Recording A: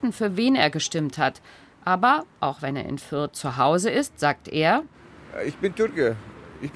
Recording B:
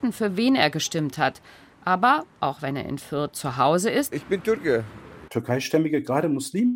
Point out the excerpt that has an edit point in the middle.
B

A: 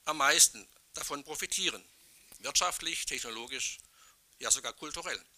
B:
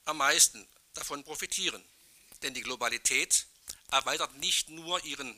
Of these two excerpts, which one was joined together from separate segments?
B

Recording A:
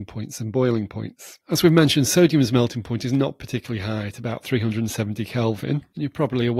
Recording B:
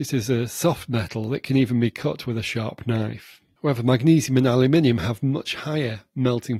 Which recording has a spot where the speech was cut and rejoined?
A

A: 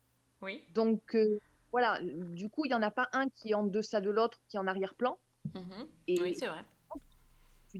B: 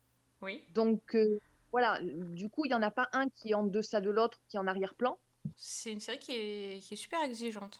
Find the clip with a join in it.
B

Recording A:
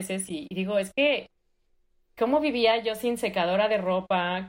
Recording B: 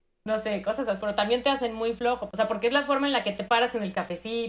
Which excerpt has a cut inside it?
B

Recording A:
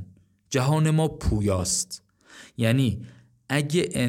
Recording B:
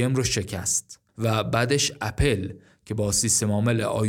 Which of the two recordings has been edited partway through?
B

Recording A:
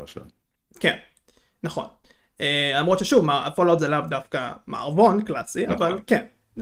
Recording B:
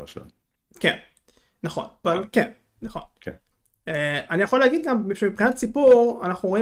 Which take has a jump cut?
B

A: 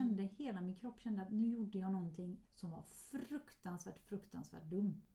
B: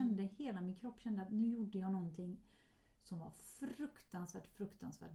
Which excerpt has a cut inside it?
A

